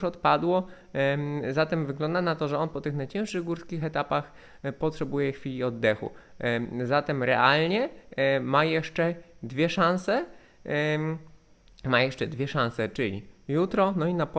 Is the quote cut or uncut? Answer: uncut